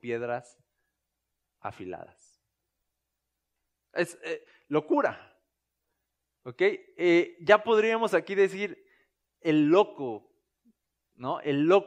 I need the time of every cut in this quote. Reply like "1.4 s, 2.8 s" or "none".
none

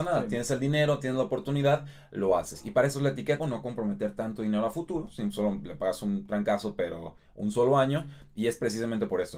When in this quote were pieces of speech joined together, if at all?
3.4 s

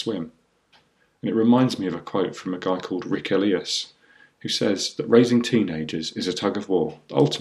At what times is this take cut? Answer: none

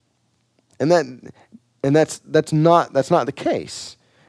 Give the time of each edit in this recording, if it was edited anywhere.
none

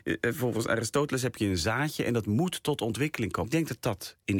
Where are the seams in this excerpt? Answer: 3.4 s

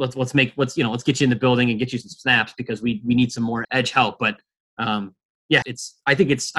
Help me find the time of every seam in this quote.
3.6 s, 5.6 s

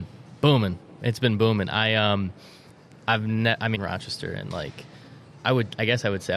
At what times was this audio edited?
3.7 s, 5.4 s

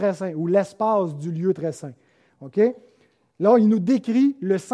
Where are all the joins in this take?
none

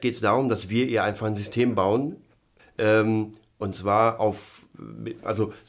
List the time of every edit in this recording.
2.6 s

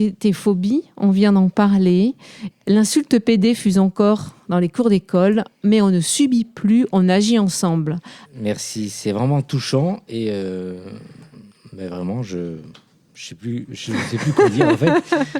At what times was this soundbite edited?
2.5 s, 8.2 s

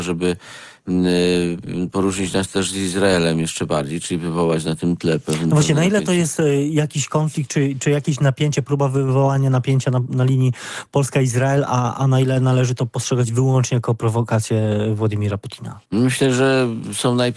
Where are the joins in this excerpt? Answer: 15.8 s

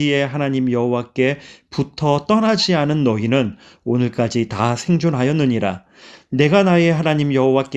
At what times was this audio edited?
none

